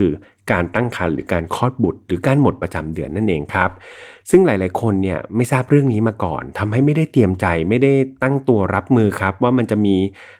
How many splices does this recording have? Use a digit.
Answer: 0